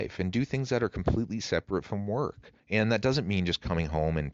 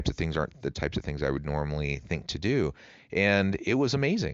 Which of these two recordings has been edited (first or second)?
first